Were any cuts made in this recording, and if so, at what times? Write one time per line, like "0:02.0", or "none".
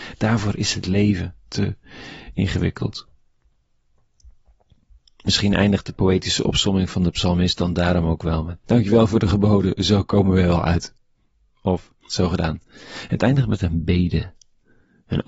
0:08.6
0:12.1